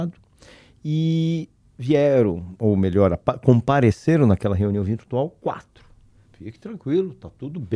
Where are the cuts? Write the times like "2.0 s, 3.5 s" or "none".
6.2 s